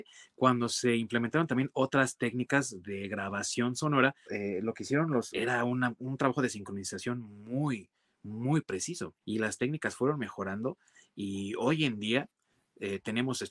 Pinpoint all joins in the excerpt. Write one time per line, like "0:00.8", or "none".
0:04.3
0:05.3
0:09.2